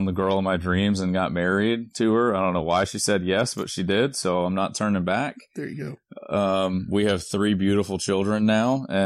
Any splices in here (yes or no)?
no